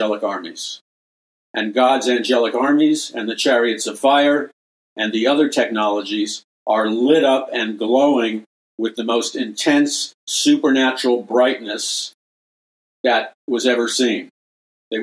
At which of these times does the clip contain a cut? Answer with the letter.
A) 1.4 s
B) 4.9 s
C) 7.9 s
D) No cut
A